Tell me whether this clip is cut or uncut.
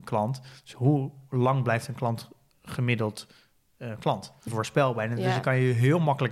cut